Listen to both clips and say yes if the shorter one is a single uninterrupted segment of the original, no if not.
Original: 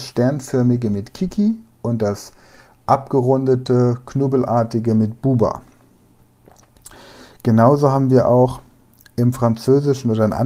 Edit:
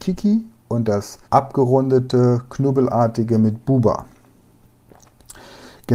no